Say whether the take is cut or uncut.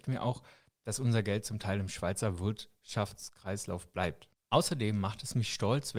uncut